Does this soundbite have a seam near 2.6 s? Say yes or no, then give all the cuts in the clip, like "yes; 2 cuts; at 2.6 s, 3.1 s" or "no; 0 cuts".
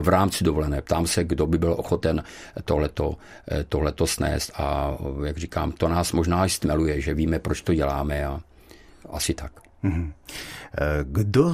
no; 0 cuts